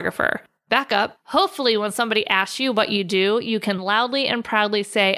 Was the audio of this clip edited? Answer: no; 0 cuts

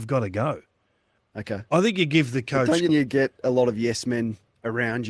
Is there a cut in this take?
yes; 2 cuts; at 1.2 s, 2.9 s

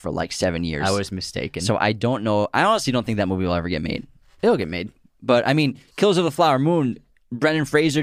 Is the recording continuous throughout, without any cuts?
yes; 0 cuts

